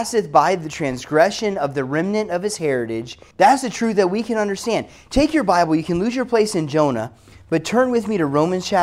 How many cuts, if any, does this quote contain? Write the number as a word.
one